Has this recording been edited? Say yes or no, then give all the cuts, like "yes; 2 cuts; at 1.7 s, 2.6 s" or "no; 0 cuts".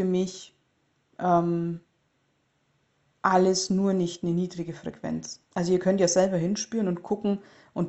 yes; 1 cut; at 5.5 s